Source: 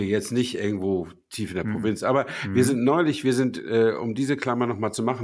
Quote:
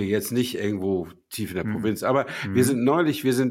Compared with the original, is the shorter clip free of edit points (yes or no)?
yes